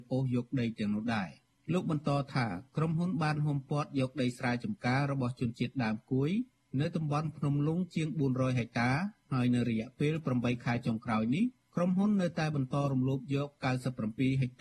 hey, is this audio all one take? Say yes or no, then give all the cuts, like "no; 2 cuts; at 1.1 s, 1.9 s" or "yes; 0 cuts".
yes; 0 cuts